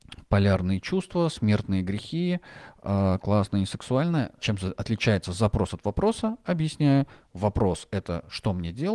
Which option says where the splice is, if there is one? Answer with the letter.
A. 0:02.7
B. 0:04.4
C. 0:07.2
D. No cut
B